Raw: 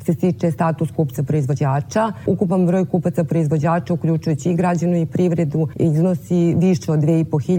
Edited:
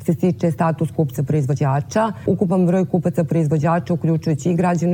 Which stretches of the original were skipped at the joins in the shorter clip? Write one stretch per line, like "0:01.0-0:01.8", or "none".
none